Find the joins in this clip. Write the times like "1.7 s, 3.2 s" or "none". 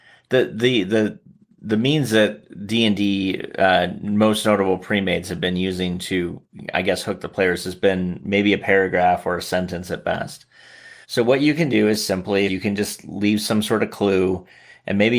11.0 s, 12.5 s